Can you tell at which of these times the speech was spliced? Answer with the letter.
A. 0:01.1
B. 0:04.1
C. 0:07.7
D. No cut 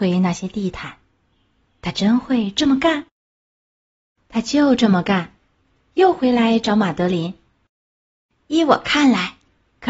C